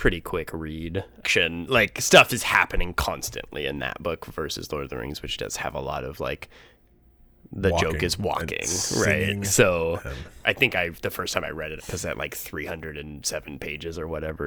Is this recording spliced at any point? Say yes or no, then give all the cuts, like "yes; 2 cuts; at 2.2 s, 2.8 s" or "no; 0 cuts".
yes; 3 cuts; at 1.2 s, 10.4 s, 11.8 s